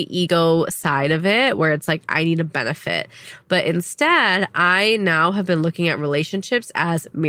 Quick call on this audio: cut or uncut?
uncut